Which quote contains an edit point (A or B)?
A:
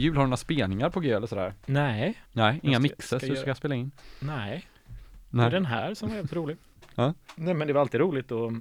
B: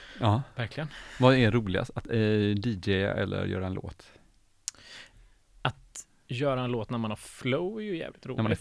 A